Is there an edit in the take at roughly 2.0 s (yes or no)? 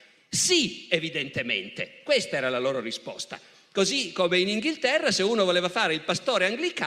no